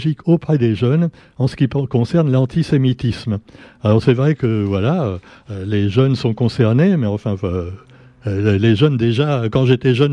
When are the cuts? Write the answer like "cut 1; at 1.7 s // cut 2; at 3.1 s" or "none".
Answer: none